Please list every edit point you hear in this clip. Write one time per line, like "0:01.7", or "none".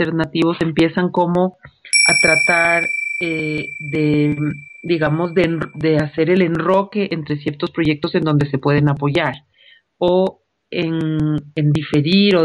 none